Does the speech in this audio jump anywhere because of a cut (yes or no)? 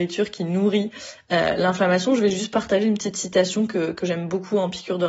no